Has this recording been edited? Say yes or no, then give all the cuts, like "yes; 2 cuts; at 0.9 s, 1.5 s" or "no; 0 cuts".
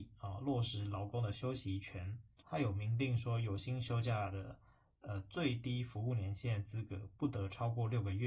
yes; 1 cut; at 2.4 s